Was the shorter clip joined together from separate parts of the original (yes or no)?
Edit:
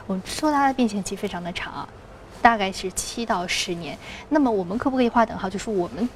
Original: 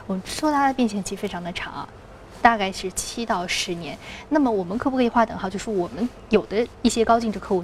no